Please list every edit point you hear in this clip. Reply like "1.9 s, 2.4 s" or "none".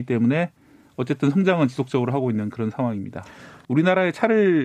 3.6 s